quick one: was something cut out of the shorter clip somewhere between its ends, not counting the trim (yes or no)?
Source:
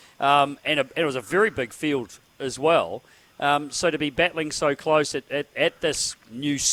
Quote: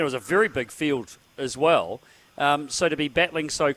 no